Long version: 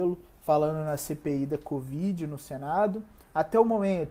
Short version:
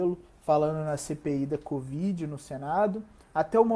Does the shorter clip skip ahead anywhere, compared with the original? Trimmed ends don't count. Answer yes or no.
no